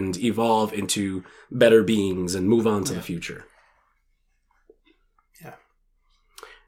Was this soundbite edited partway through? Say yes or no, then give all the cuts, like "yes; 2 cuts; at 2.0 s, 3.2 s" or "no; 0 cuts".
no; 0 cuts